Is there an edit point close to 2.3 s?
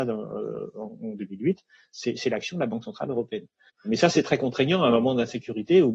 no; 1 cut; at 3.7 s

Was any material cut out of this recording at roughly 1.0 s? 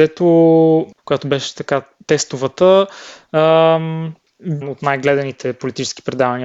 yes; 2 cuts; at 1.0 s, 4.6 s

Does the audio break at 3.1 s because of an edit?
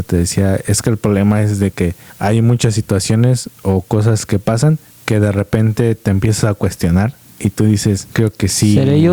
no; 1 cut; at 8.1 s

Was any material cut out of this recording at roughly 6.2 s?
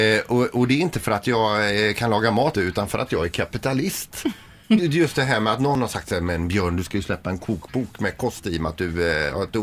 no; 2 cuts; at 2.5 s, 4.8 s

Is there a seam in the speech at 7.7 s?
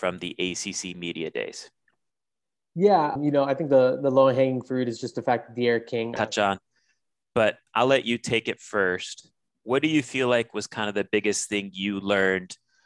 yes; 3 cuts; at 3.2 s, 6.2 s, 7.7 s

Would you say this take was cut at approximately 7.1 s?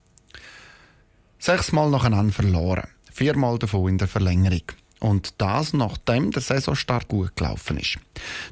yes; 1 cut; at 7.1 s

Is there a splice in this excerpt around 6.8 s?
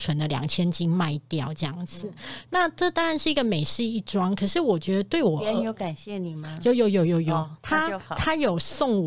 no; 0 cuts

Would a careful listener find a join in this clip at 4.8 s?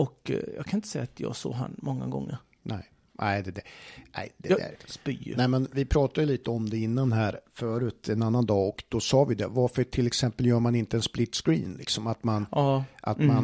yes; 1 cut; at 4.8 s

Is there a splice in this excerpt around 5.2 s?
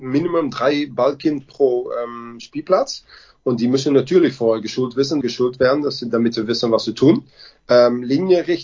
yes; 1 cut; at 5.2 s

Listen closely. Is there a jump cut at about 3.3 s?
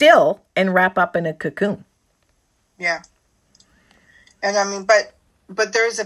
no; 0 cuts

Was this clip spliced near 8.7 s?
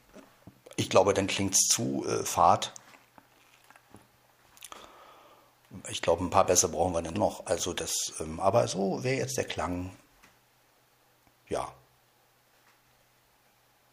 no; 1 cut; at 7.1 s

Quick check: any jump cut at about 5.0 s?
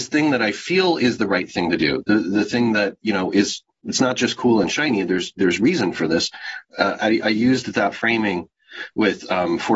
no; 1 cut; at 6.6 s

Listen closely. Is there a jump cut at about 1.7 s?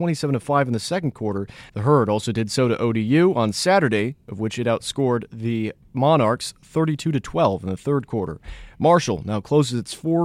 yes; 1 cut; at 1.7 s

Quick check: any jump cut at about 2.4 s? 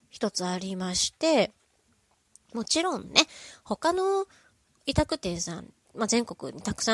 no; 0 cuts

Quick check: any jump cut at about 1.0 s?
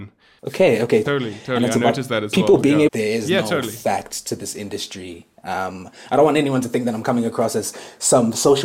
yes; 2 cuts; at 1.0 s, 2.9 s

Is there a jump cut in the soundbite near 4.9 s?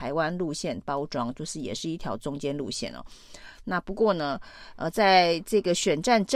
no; 0 cuts

